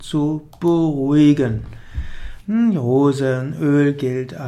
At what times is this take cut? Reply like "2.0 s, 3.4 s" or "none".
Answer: 2.4 s